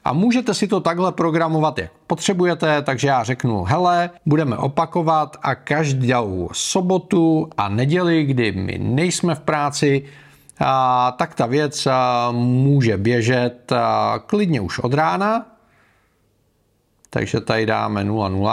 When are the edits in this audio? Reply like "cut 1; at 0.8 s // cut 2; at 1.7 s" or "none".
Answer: cut 1; at 4.2 s